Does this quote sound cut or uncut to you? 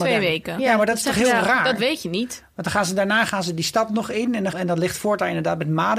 cut